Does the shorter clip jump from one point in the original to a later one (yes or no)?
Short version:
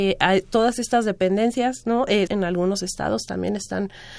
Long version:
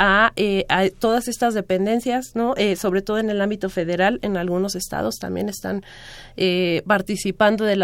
yes